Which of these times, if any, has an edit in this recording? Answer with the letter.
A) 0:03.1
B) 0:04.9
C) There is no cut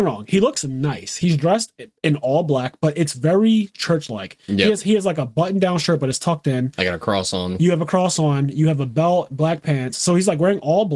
C